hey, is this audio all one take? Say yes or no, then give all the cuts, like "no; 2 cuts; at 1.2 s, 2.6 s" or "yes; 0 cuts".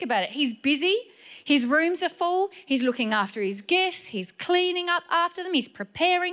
yes; 0 cuts